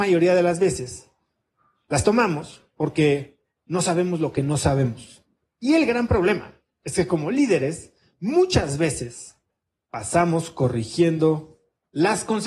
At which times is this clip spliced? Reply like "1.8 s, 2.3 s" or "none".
5.4 s